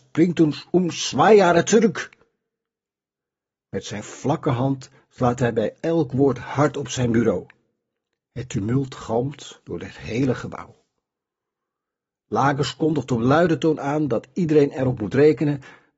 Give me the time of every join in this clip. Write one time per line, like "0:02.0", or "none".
none